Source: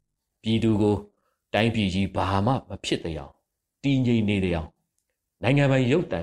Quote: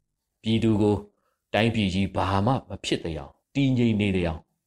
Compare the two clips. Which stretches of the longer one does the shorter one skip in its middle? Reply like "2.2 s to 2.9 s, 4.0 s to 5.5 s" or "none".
3.4 s to 3.7 s